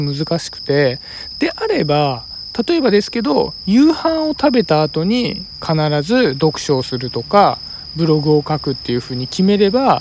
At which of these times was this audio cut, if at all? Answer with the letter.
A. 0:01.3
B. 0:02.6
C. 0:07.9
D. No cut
A